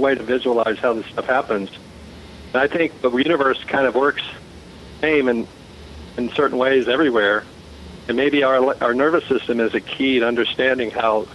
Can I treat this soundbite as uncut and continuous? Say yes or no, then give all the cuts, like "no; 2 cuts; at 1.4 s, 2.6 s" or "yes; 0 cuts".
yes; 0 cuts